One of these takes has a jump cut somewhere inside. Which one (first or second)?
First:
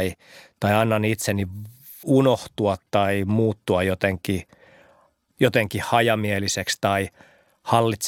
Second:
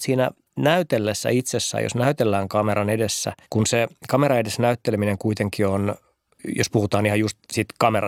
second